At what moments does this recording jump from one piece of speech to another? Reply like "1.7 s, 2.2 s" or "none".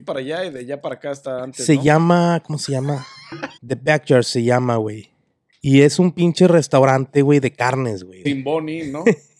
3.6 s, 8.2 s